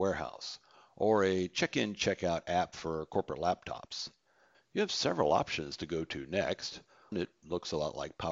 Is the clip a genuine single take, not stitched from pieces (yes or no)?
no